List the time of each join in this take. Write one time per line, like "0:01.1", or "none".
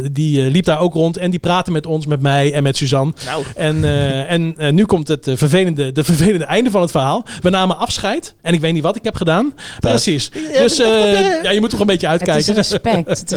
0:09.8
0:11.4